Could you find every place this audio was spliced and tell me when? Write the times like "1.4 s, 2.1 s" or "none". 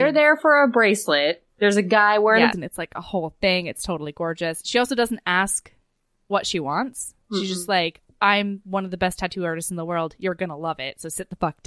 2.5 s